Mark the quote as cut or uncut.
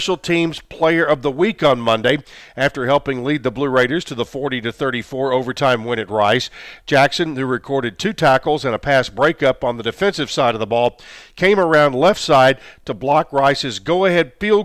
uncut